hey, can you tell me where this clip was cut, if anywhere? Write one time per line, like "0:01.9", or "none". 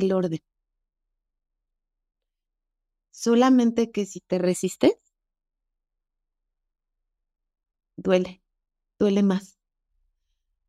none